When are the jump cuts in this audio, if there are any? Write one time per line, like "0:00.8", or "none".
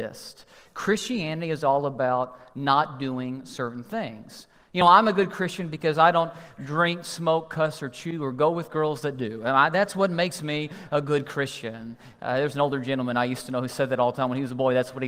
none

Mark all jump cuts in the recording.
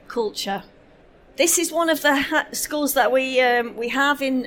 none

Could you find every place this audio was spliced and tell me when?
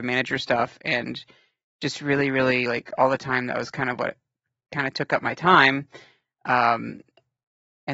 none

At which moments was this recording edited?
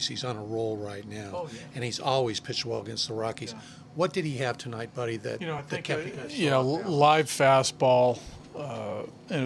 none

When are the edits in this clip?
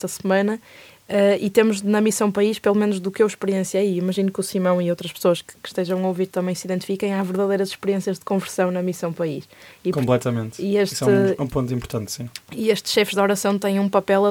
none

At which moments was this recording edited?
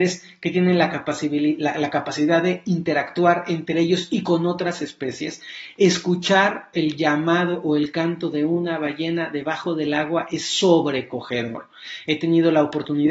none

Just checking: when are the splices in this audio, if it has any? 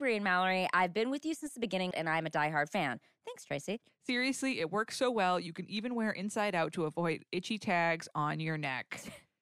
0:01.9
0:03.9

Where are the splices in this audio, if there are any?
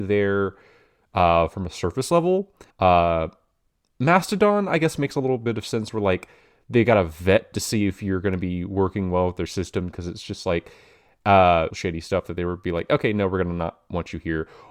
0:02.7
0:11.7

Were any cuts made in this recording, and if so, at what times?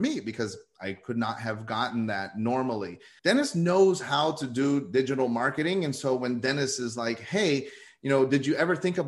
0:03.2

